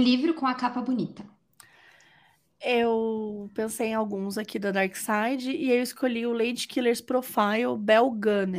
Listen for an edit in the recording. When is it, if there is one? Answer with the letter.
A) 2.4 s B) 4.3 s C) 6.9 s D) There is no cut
D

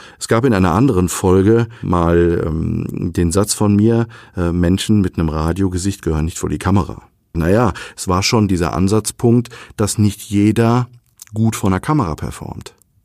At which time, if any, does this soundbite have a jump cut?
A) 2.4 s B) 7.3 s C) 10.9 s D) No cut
B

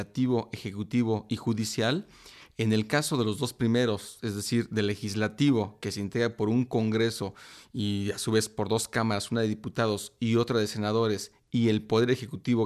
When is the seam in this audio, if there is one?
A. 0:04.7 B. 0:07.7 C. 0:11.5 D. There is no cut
D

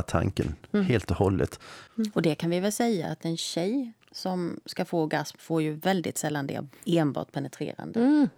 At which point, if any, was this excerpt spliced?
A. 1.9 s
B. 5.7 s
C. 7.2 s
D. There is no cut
A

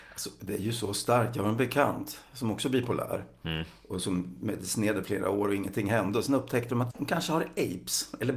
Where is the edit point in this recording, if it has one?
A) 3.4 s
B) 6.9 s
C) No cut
B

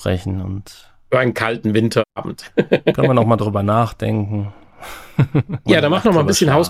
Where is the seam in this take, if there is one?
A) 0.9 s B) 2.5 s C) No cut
C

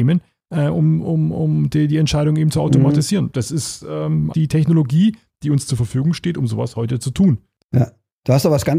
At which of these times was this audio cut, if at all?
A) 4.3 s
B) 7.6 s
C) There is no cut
A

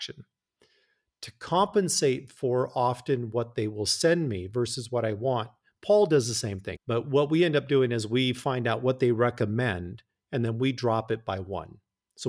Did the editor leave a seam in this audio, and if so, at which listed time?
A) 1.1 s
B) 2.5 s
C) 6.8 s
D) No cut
C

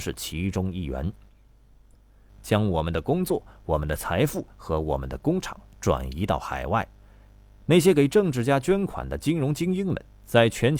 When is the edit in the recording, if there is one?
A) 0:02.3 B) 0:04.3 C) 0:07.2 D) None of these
A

